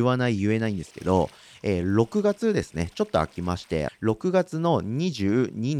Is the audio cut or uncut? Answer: cut